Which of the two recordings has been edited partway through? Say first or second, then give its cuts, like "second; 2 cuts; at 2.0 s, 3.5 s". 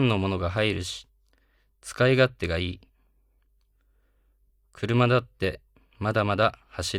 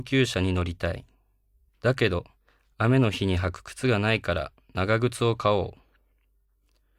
second; 1 cut; at 1.7 s